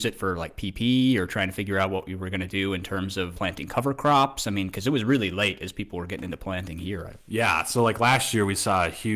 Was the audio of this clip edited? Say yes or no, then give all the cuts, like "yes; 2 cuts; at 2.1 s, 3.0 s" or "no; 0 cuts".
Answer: yes; 1 cut; at 3.3 s